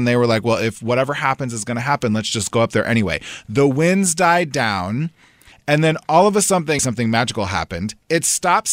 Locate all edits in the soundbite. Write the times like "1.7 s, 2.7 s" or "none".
5.5 s, 6.8 s